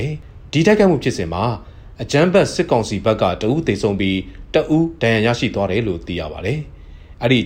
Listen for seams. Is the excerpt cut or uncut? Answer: uncut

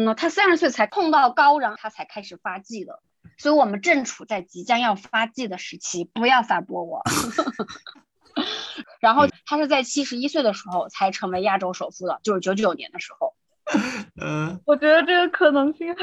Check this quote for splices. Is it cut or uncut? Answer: cut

